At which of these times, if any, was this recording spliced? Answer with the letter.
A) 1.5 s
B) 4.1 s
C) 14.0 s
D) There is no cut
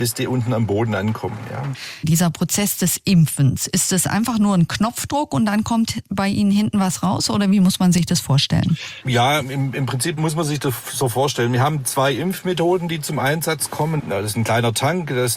C